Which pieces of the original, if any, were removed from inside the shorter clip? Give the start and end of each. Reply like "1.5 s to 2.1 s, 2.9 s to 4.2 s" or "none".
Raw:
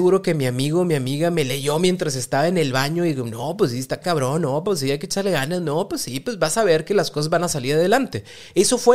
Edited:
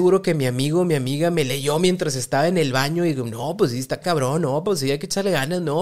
none